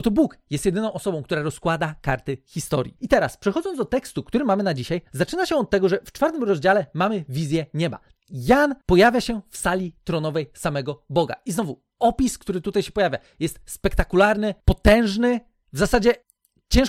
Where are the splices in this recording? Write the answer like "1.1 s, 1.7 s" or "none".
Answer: 3.0 s